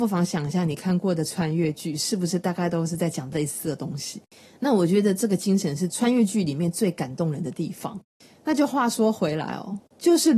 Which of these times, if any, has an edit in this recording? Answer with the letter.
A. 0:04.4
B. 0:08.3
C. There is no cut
C